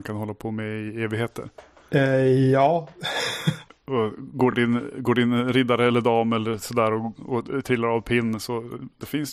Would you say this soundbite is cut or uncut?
uncut